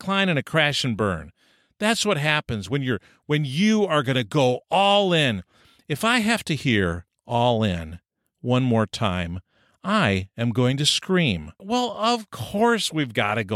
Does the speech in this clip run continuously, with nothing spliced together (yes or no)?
no